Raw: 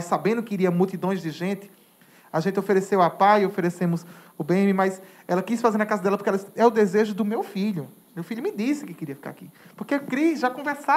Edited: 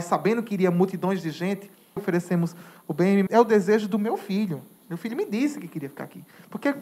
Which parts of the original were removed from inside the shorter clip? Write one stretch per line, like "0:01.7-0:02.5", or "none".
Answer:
0:02.0-0:03.5
0:04.8-0:06.5